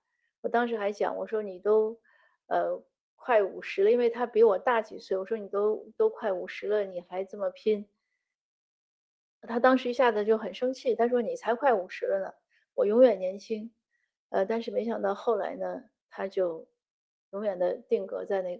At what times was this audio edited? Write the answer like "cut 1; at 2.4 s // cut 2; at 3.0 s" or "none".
none